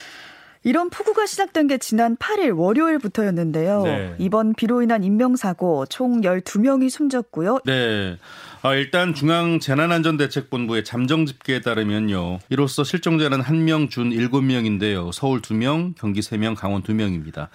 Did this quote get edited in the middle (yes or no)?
yes